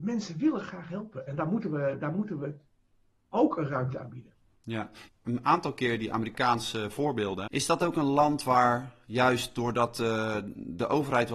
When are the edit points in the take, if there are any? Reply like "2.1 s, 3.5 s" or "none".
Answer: 5.1 s, 7.5 s